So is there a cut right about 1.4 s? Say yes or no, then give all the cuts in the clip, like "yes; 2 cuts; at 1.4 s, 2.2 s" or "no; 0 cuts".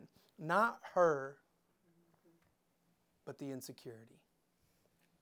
no; 0 cuts